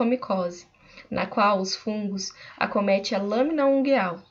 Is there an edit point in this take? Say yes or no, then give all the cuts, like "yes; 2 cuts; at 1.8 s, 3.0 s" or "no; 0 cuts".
no; 0 cuts